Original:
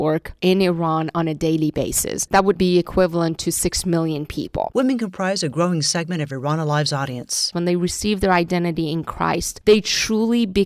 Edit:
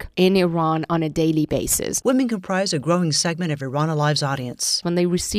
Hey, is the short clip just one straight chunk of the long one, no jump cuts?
no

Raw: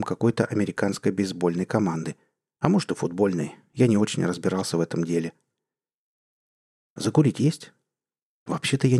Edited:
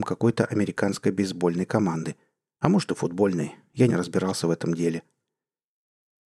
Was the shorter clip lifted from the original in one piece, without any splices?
no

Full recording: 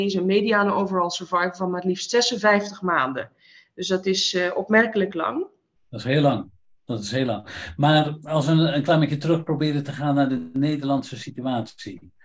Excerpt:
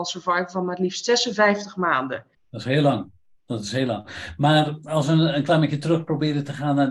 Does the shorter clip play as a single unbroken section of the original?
no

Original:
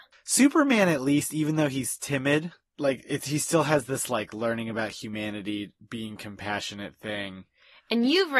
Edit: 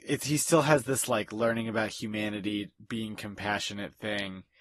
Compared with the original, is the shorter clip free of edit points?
yes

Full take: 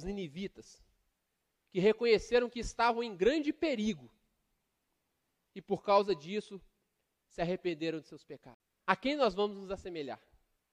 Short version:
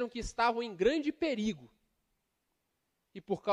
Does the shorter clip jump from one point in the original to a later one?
no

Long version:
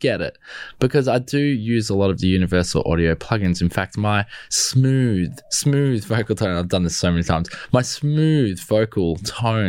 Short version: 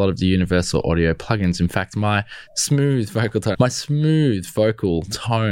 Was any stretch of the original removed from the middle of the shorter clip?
yes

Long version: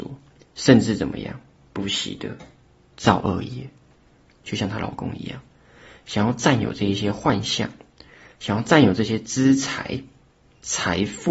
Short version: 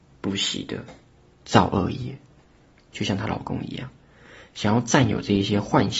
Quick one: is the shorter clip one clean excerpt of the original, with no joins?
yes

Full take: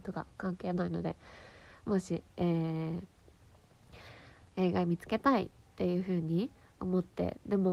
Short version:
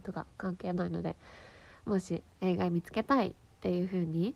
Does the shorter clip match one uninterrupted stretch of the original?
no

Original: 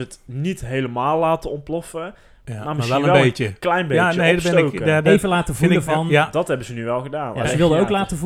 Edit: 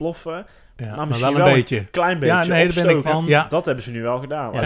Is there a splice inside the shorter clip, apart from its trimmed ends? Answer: yes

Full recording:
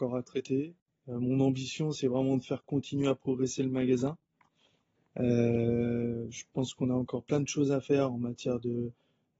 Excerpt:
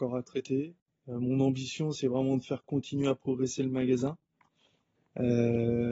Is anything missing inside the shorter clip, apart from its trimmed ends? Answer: no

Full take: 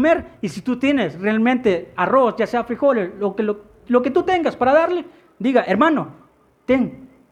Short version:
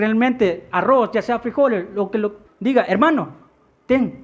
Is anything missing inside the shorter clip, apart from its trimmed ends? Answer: yes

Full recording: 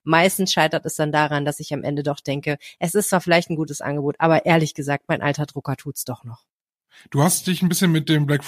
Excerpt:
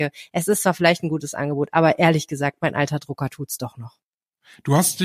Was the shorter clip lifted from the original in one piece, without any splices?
yes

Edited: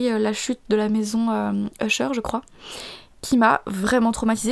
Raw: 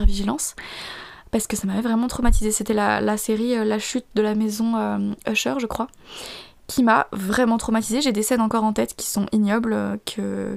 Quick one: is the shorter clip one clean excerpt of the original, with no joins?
yes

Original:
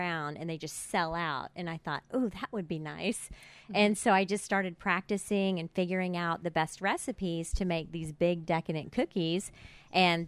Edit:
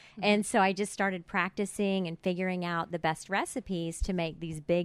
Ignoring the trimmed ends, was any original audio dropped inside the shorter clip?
no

